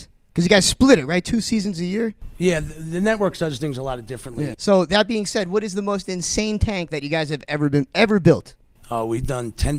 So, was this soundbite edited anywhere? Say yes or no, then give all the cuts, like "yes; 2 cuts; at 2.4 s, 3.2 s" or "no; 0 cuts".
yes; 1 cut; at 4.5 s